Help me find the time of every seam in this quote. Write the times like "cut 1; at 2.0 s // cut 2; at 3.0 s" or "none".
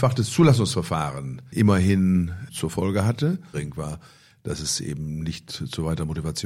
cut 1; at 3.5 s